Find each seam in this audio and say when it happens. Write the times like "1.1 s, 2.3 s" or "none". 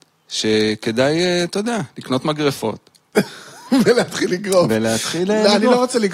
none